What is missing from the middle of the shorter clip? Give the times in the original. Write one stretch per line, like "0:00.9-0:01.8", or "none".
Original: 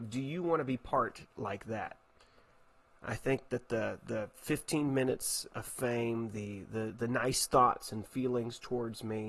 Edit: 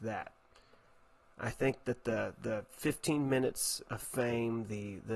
none